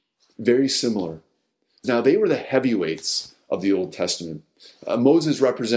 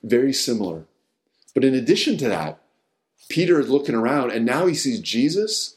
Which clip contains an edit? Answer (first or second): first